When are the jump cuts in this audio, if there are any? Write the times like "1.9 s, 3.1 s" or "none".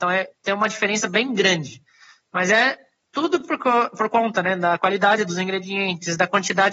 none